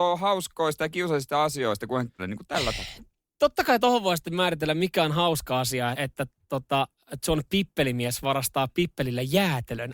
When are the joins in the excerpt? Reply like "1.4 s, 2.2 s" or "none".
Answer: 2.2 s, 5.9 s